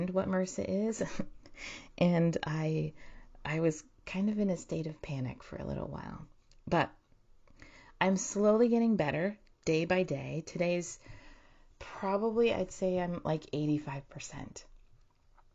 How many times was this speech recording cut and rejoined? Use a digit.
0